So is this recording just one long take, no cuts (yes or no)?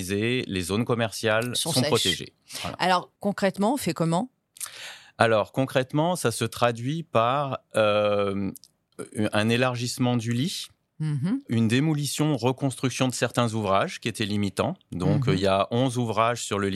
yes